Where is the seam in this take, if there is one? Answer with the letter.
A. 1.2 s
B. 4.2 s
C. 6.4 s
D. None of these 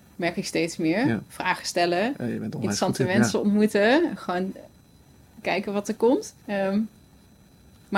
C